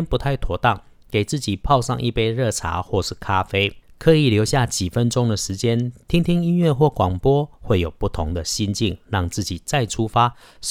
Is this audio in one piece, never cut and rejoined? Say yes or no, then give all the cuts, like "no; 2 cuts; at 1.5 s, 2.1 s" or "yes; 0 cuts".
yes; 0 cuts